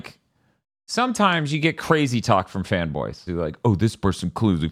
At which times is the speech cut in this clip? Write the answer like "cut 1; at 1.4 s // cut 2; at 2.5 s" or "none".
cut 1; at 3.3 s